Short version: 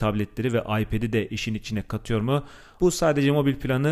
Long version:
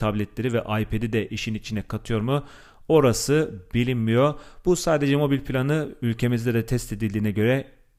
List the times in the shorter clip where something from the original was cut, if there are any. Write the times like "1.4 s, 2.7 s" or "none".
2.8 s